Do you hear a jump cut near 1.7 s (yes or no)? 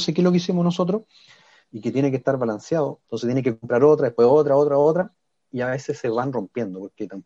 no